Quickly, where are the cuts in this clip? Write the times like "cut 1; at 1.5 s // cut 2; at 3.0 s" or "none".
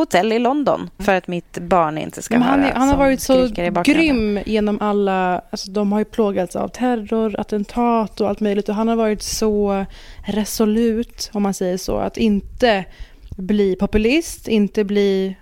cut 1; at 1.0 s